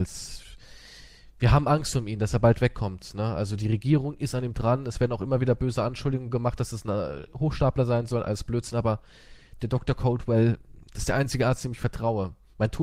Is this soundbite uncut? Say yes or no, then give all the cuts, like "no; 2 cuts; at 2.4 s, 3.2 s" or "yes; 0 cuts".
yes; 0 cuts